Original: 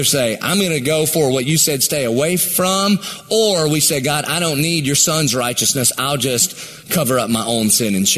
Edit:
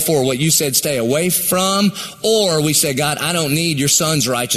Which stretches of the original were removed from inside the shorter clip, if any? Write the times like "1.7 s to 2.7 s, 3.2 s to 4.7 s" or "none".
none